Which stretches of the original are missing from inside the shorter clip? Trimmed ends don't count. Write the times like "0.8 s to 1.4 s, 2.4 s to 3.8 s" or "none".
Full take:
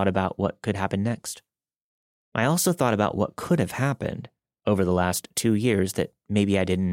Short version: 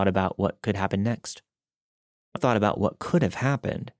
2.4 s to 2.7 s